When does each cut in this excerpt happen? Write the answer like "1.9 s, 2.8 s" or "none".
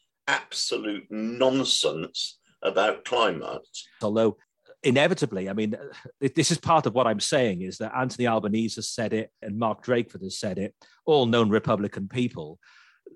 4.0 s, 9.4 s